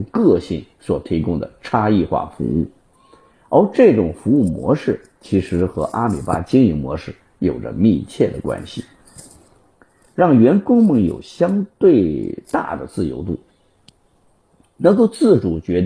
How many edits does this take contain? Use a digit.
1